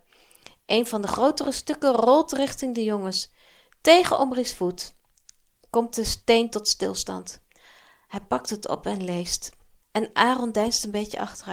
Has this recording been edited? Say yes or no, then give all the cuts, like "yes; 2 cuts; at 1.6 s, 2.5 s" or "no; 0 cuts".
yes; 1 cut; at 9.8 s